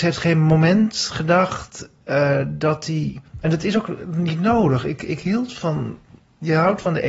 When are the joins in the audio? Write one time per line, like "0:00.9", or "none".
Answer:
none

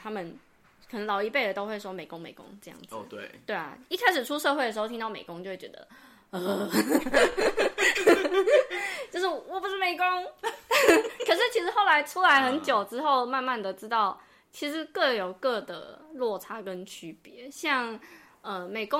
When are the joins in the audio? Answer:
none

